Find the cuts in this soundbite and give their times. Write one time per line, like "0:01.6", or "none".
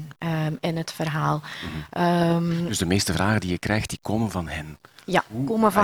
none